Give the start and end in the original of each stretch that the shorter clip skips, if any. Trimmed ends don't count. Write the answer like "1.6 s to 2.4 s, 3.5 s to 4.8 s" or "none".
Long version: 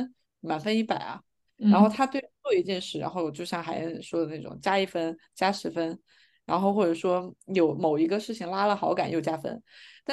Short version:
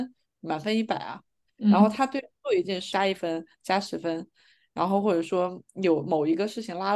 2.9 s to 4.6 s